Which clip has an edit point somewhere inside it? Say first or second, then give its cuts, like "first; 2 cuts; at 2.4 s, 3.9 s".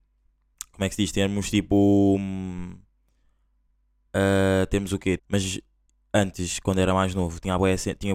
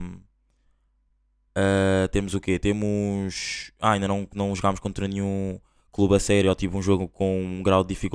first; 1 cut; at 5.2 s